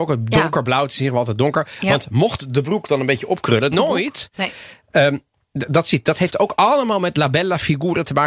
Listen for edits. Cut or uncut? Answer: cut